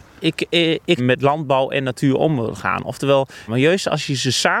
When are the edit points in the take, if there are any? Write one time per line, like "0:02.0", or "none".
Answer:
0:01.0
0:03.5